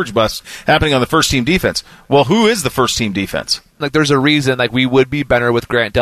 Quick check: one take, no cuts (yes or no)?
no